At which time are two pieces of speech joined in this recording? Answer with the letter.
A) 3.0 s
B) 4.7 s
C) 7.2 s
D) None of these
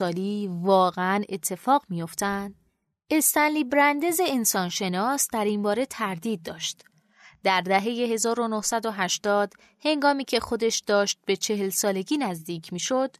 D